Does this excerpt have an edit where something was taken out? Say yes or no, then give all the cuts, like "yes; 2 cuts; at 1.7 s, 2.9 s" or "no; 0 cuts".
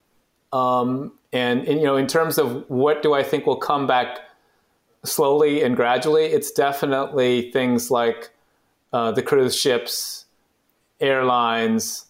no; 0 cuts